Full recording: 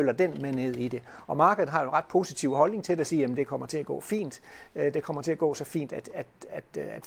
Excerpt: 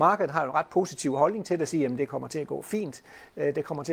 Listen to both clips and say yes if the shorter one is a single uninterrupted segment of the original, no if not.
yes